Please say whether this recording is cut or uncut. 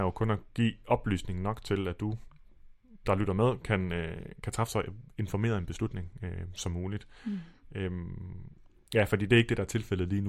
cut